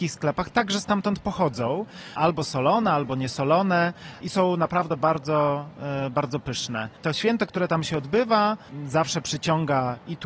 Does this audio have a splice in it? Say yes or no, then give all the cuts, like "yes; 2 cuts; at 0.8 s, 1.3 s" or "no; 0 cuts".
no; 0 cuts